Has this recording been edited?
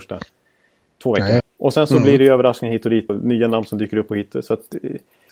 yes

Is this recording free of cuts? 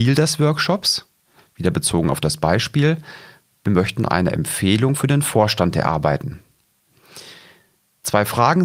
yes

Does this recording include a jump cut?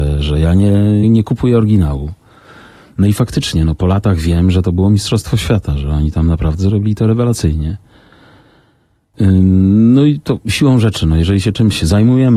yes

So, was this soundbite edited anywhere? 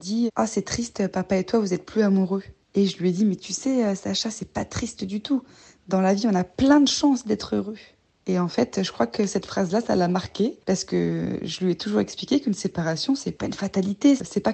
no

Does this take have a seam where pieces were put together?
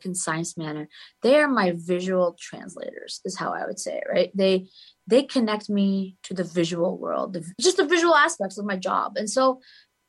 yes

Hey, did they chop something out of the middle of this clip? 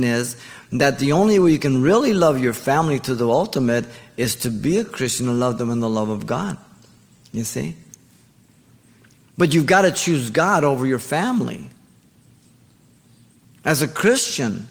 no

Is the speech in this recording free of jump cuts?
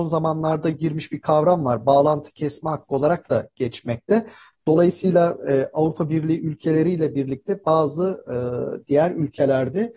yes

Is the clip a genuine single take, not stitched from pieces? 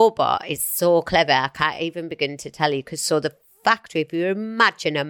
yes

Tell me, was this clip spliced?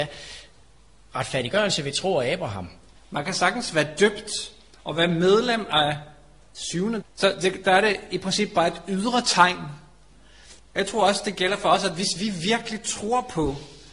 yes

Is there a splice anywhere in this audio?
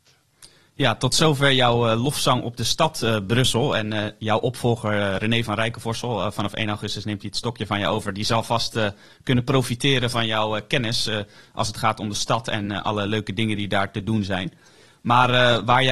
no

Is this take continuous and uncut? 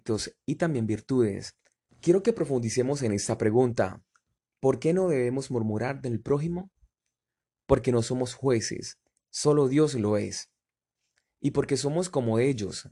no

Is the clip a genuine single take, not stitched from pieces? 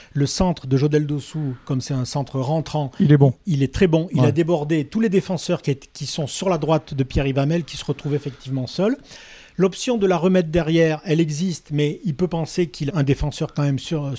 no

